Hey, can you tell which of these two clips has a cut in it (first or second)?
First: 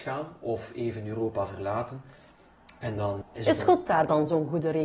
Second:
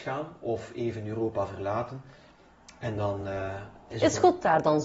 first